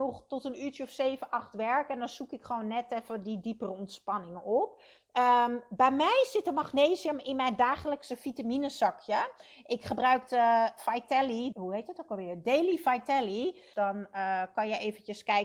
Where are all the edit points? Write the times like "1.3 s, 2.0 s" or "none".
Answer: 11.5 s, 13.7 s